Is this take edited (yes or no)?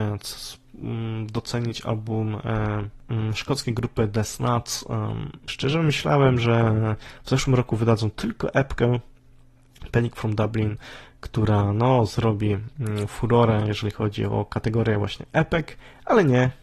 yes